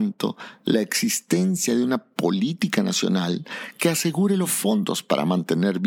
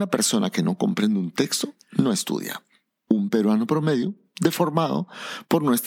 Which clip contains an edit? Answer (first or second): second